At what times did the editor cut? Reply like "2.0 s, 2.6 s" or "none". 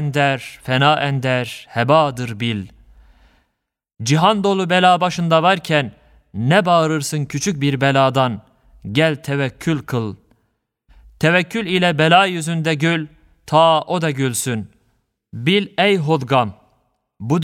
15.2 s